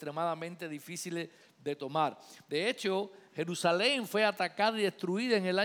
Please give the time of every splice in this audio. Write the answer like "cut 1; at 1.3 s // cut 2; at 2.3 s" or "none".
none